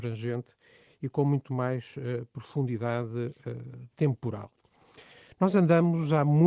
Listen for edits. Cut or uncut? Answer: uncut